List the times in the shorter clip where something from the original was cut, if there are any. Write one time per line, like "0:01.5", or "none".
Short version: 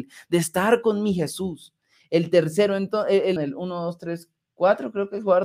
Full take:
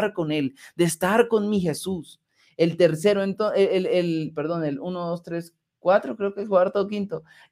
0:03.4